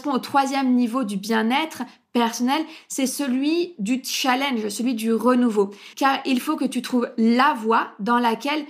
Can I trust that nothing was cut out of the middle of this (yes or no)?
no